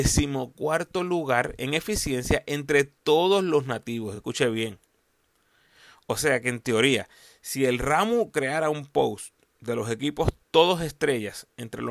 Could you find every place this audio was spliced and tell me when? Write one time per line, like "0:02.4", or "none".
none